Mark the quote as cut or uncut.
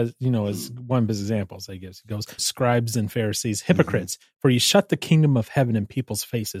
cut